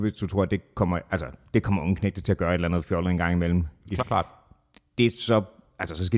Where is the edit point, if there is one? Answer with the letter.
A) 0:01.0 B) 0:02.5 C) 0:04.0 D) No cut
C